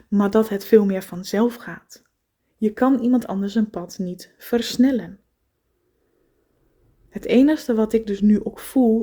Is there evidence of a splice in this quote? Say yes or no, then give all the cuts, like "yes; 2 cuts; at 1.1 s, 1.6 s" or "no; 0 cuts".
yes; 1 cut; at 2.4 s